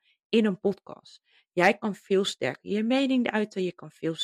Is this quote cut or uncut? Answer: uncut